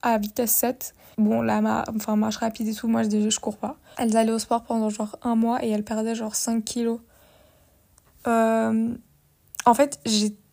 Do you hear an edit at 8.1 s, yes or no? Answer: yes